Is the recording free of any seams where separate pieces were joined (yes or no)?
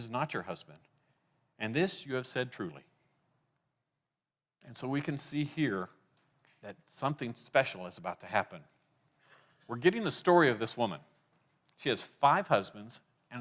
yes